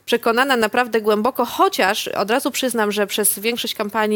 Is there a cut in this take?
no; 0 cuts

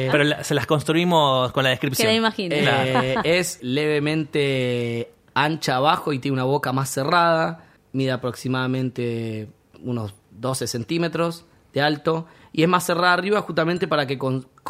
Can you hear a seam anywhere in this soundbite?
yes; 1 cut; at 3.6 s

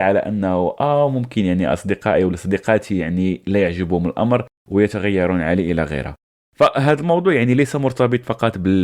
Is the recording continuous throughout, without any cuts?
yes; 0 cuts

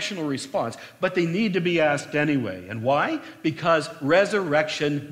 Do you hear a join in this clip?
no; 0 cuts

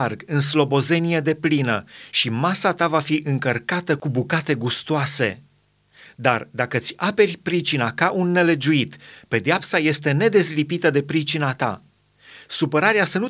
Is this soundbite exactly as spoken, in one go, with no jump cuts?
yes; 0 cuts

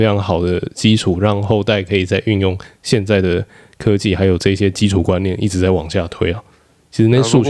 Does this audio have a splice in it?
no; 0 cuts

